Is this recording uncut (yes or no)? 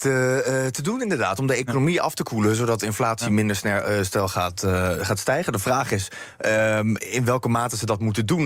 yes